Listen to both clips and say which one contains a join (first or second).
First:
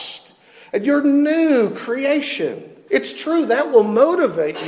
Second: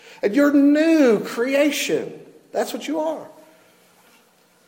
first